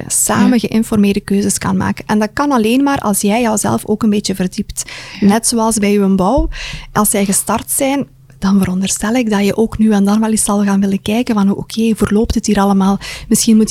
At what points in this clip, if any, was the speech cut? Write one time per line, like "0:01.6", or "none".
none